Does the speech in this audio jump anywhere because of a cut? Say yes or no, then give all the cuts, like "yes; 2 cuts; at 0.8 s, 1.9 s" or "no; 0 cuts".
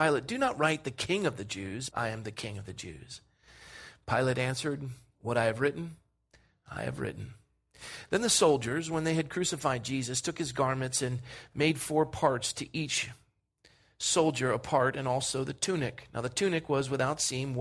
yes; 1 cut; at 1.9 s